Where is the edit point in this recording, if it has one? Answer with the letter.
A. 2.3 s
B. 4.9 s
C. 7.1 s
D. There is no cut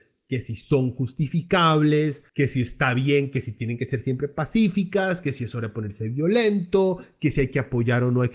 A